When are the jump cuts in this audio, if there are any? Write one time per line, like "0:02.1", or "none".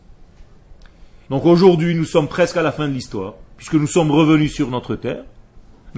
0:01.3